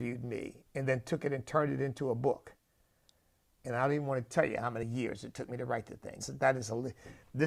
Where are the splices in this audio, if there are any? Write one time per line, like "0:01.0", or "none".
0:03.6
0:06.2